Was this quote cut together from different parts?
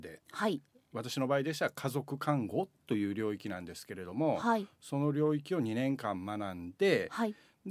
no; 0 cuts

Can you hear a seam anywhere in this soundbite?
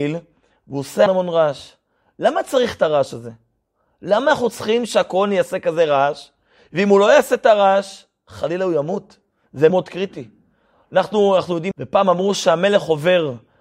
yes; 3 cuts; at 1.1 s, 9.7 s, 11.7 s

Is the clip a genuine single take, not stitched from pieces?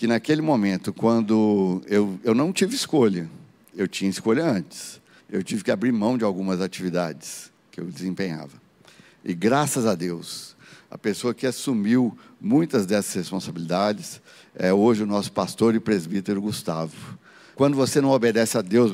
no; 2 cuts; at 5.2 s, 17.5 s

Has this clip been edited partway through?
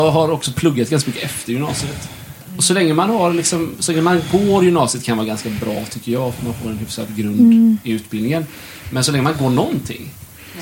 no; 0 cuts

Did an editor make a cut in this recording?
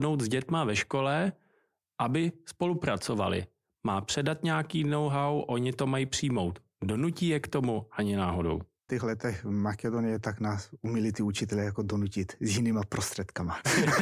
yes; 1 cut; at 8.9 s

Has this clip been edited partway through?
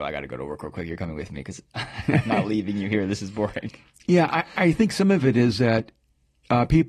no; 0 cuts

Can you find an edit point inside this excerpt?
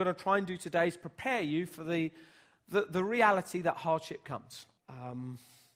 yes; 1 cut; at 4.8 s

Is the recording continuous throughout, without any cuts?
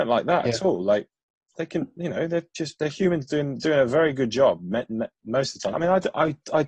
no; 1 cut; at 5.7 s

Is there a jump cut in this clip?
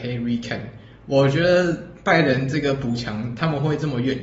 no; 0 cuts

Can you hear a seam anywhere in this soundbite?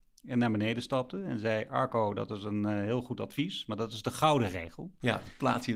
no; 0 cuts

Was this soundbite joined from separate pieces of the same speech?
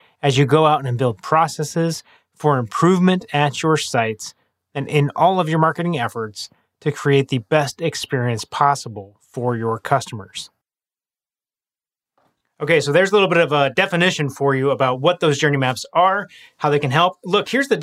no; 0 cuts

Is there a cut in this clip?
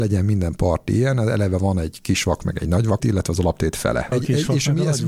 yes; 2 cuts; at 3.0 s, 4.1 s

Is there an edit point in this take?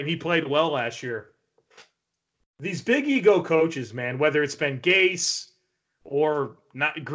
yes; 1 cut; at 2.4 s

